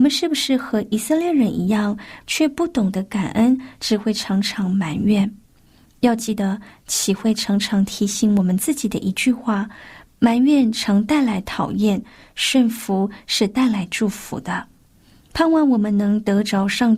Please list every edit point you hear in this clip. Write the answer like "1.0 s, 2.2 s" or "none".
2.2 s

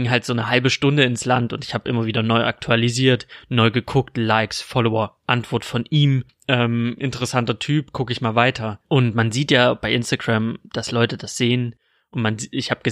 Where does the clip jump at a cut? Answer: 6.3 s, 8.8 s

